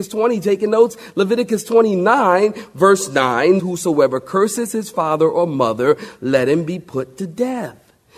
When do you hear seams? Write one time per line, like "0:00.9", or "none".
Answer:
0:03.6